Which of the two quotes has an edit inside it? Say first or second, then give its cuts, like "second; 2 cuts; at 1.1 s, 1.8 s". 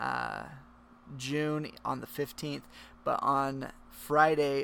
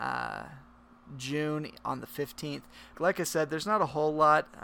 second; 1 cut; at 2.9 s